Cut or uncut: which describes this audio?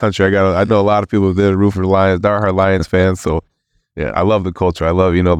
uncut